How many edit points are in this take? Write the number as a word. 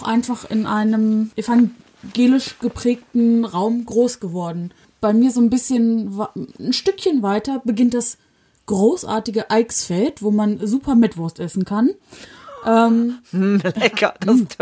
zero